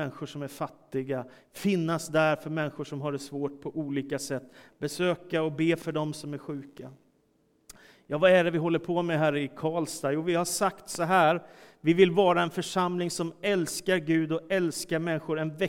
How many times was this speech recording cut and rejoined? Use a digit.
1